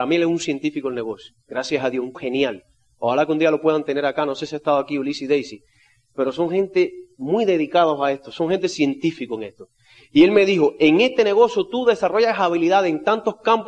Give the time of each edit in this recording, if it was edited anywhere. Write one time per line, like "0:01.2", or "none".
0:02.1